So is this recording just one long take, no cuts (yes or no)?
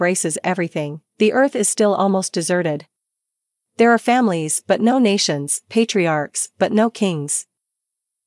no